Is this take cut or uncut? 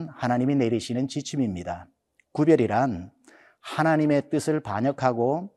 uncut